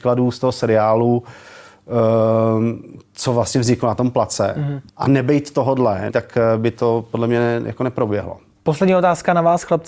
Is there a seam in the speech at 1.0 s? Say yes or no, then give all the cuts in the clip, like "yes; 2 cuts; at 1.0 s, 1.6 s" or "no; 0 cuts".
no; 3 cuts; at 4.9 s, 6.1 s, 8.5 s